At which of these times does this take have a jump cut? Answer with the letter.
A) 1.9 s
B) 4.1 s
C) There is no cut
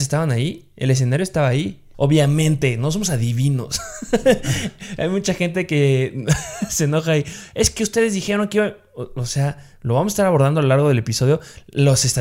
A